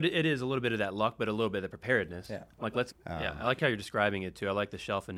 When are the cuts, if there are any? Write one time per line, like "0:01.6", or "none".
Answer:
0:02.9

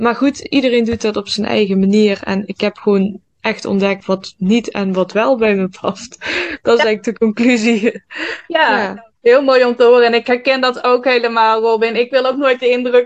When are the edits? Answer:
0:04.0

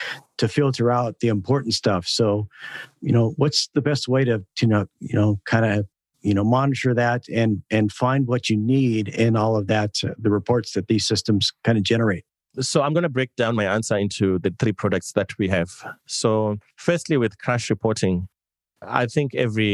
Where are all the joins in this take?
none

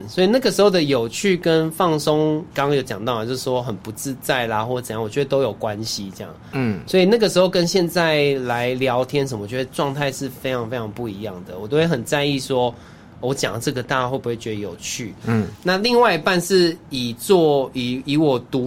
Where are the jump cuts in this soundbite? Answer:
0:02.5
0:15.2

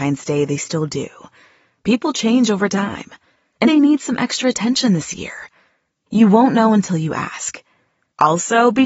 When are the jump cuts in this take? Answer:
0:03.7

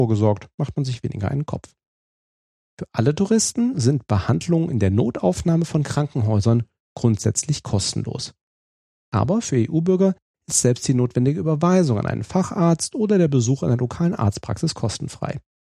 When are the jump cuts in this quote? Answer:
0:02.7

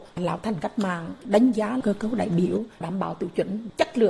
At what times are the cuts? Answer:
none

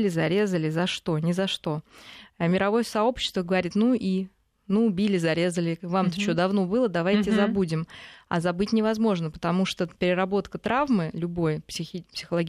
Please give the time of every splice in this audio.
none

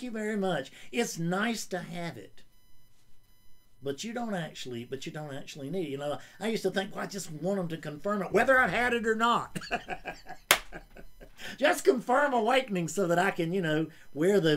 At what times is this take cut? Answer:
none

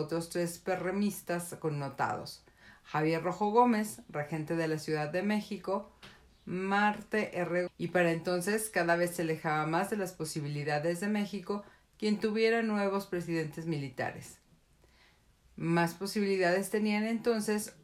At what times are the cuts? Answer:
0:07.7

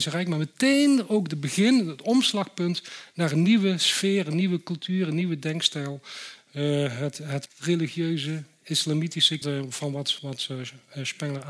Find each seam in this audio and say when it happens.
0:07.5
0:09.4

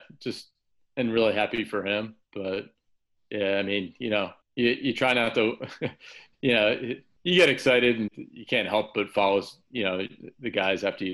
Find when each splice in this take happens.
0:04.4
0:08.1

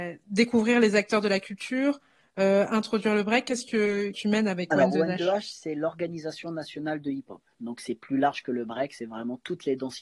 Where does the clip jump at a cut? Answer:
0:04.1

